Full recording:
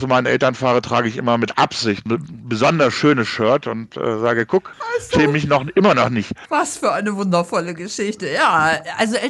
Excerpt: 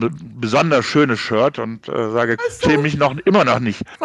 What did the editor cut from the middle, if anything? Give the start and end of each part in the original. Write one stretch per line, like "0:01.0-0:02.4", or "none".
0:04.5-0:04.9